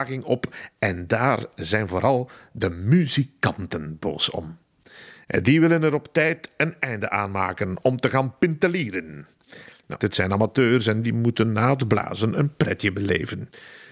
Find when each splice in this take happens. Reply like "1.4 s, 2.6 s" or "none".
10.0 s